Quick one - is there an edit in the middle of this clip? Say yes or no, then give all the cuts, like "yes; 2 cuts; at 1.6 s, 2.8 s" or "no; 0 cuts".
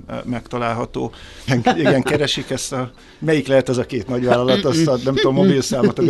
yes; 1 cut; at 1.5 s